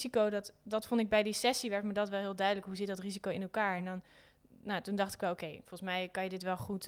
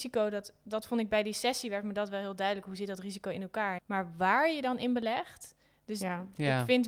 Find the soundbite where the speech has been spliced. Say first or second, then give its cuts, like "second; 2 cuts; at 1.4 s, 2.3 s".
second; 1 cut; at 3.8 s